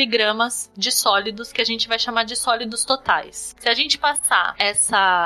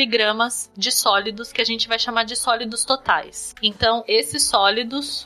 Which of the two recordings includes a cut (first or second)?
second